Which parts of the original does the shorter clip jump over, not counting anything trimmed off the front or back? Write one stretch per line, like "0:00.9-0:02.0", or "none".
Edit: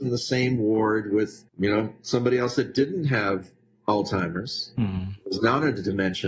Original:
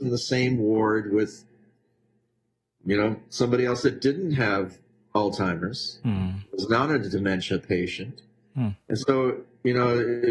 0:01.5-0:02.8